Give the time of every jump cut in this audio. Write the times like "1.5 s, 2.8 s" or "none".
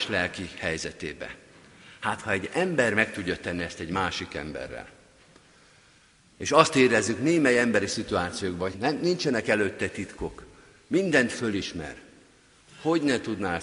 8.7 s